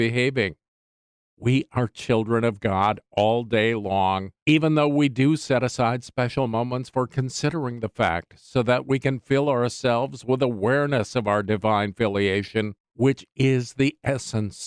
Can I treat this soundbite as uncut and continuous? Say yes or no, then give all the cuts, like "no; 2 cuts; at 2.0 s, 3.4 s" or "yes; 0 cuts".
yes; 0 cuts